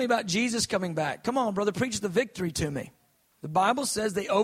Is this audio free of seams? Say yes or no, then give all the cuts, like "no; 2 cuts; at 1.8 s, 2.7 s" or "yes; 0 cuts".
no; 1 cut; at 3.3 s